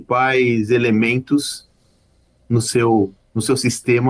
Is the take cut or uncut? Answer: uncut